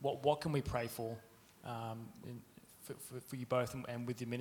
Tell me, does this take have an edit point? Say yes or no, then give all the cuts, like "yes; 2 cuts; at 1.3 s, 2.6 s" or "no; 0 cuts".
yes; 1 cut; at 2.2 s